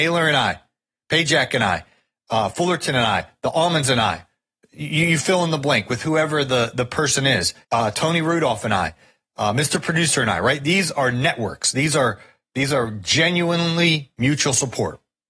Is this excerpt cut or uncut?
cut